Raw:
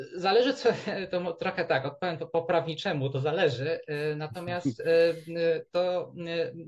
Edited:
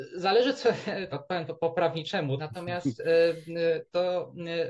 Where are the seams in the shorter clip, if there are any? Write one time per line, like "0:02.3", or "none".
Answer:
0:01.1
0:02.4